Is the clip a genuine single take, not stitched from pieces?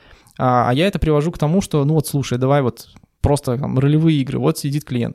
yes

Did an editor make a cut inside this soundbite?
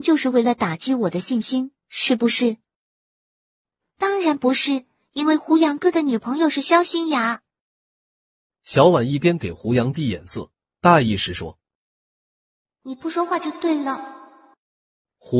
no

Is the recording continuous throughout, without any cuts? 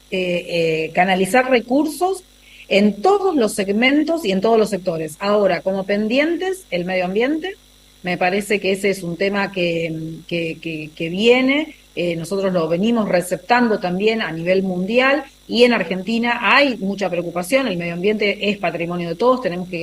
yes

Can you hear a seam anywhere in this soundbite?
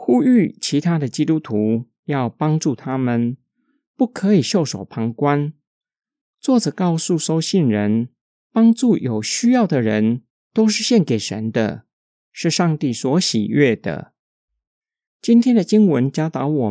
yes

